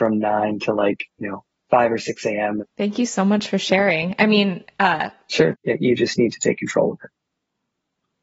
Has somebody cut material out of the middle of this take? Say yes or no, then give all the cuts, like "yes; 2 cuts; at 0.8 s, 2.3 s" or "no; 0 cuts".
yes; 2 cuts; at 2.6 s, 5.5 s